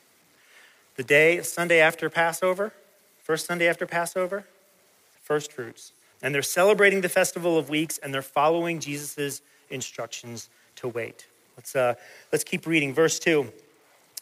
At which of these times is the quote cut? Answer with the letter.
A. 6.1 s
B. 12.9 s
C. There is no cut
A